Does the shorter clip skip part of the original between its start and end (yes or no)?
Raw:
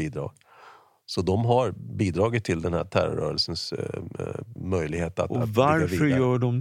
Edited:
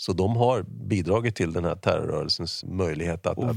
yes